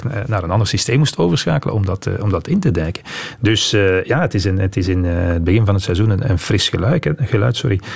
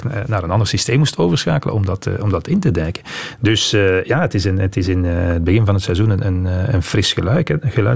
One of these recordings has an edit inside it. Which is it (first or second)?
first